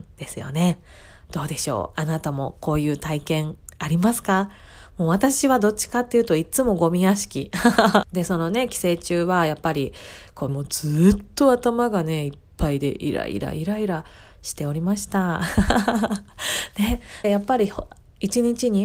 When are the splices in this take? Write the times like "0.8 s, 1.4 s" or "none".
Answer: 8.0 s, 10.5 s, 17.2 s

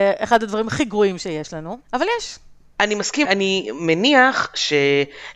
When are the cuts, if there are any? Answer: 1.8 s, 3.2 s

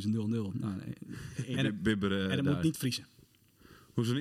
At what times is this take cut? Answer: 1.6 s

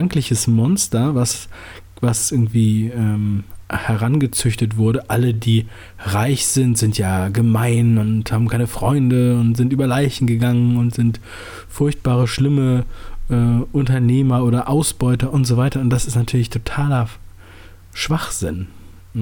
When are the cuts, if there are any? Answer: none

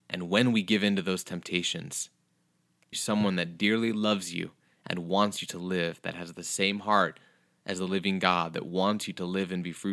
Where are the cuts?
2.9 s

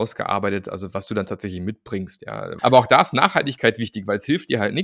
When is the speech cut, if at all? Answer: 2.6 s

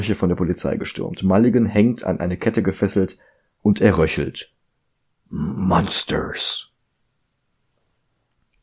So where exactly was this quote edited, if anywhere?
3.6 s

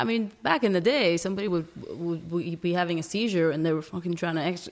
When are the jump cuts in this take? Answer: none

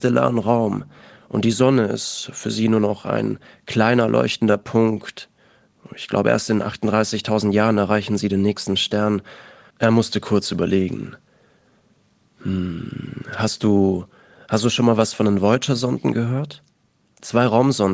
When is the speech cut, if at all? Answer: 9.7 s

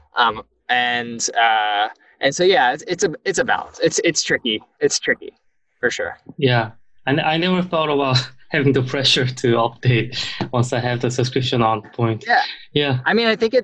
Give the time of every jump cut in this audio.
11.8 s

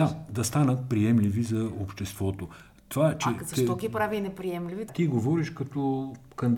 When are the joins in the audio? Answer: 4.9 s

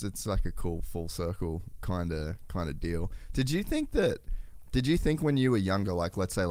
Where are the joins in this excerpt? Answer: none

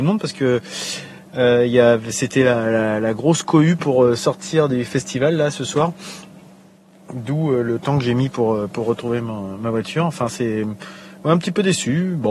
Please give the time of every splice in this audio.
none

